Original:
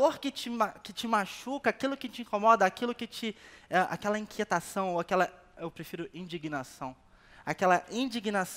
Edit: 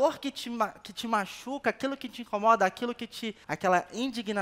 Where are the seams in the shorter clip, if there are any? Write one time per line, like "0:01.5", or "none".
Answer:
0:03.4